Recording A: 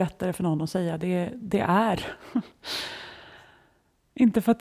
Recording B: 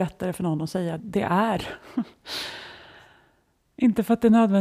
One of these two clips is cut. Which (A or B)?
B